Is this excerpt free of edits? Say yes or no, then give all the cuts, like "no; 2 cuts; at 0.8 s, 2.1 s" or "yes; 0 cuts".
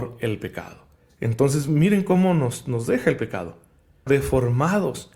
no; 1 cut; at 4.1 s